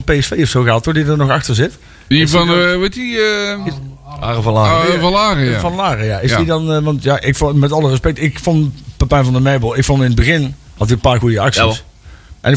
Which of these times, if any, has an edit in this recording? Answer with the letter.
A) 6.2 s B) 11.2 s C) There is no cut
B